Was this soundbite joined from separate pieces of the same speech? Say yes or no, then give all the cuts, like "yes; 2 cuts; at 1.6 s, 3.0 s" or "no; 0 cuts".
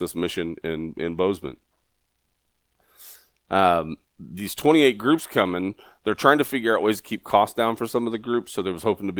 no; 0 cuts